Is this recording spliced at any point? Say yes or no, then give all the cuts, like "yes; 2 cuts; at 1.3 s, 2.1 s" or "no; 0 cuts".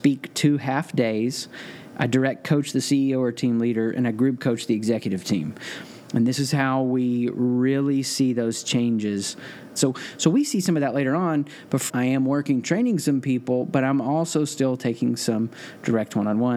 yes; 2 cuts; at 9.8 s, 11.9 s